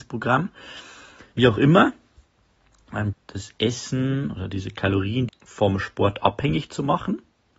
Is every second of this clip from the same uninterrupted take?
no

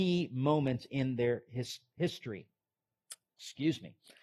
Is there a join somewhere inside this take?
no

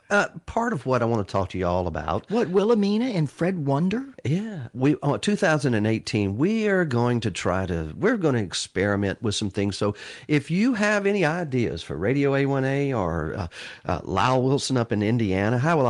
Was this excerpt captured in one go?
yes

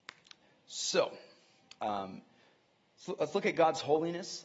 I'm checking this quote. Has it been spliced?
no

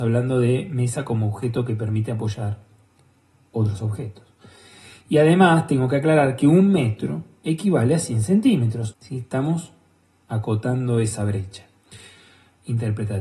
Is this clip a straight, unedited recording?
no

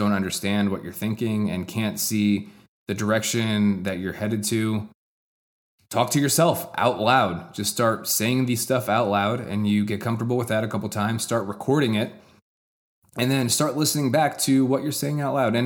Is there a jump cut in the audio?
no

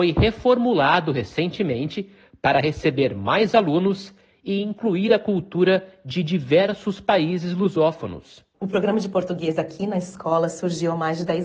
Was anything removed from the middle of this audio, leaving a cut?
yes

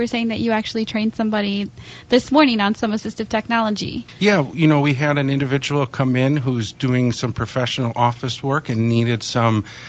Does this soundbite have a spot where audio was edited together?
no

